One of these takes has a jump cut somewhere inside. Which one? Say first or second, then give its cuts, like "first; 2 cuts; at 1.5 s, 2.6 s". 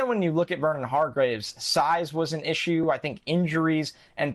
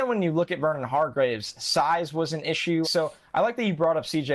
second; 1 cut; at 2.8 s